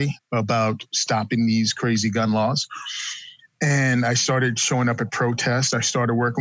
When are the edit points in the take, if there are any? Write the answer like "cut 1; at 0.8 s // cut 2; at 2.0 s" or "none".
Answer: none